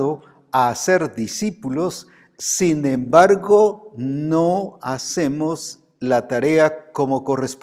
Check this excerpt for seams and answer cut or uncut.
uncut